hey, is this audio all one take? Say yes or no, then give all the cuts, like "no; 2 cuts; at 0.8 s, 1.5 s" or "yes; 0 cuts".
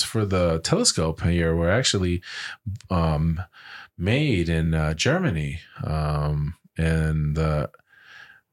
yes; 0 cuts